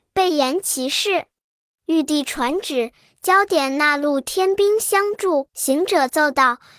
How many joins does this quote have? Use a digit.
1